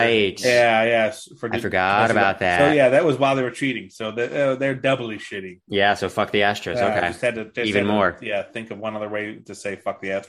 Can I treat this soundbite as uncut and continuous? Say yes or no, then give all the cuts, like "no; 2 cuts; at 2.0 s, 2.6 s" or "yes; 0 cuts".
yes; 0 cuts